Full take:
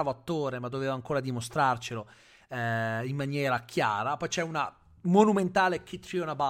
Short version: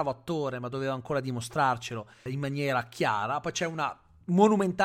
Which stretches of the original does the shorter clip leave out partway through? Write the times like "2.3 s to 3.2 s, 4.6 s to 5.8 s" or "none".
2.3 s to 3.0 s